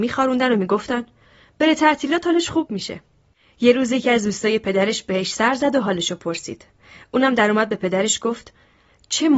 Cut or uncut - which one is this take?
uncut